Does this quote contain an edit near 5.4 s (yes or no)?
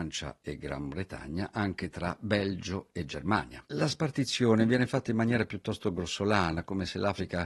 no